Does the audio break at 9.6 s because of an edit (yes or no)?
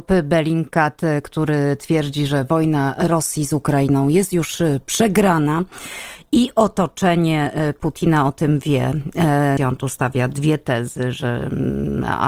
yes